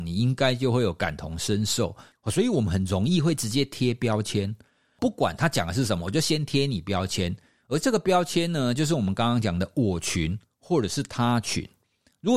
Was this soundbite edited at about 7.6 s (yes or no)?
no